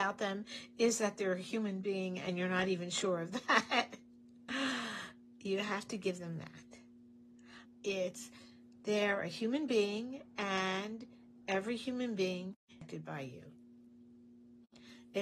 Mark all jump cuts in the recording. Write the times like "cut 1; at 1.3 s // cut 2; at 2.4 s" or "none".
cut 1; at 7.6 s